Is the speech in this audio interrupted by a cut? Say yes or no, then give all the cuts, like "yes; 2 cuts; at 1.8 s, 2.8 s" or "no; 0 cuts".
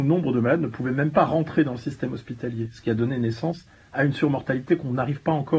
no; 0 cuts